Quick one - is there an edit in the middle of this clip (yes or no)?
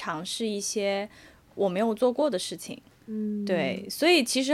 no